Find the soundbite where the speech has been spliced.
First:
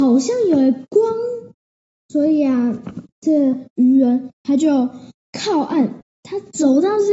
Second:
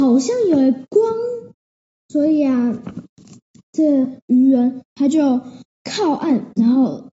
first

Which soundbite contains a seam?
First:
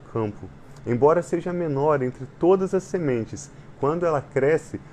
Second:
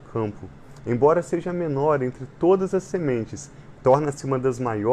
second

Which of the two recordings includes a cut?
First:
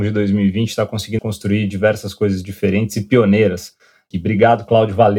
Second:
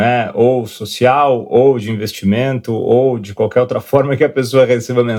first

